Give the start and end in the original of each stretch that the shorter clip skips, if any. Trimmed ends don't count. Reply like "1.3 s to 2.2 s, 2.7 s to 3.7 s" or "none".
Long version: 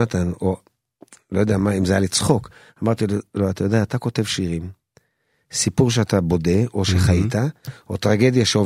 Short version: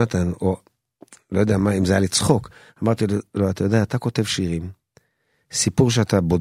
none